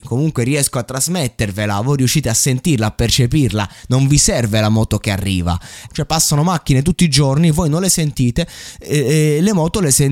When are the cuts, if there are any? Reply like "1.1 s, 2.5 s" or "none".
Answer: 5.9 s